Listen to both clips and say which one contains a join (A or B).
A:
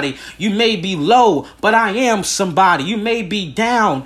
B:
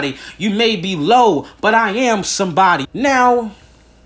B